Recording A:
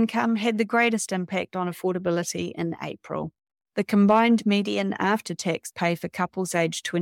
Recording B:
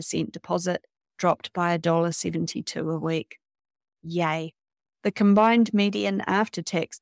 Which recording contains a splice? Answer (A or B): B